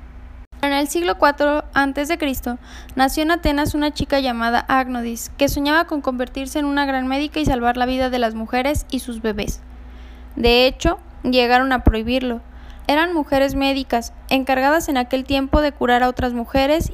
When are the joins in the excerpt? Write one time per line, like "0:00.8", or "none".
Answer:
0:10.3
0:12.8